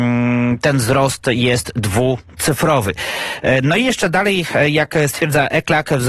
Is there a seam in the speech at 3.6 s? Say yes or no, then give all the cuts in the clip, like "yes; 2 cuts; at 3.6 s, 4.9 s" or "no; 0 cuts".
no; 0 cuts